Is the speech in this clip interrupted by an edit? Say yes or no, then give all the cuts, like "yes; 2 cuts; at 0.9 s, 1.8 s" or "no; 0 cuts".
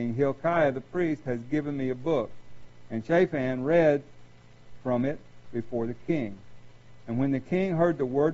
no; 0 cuts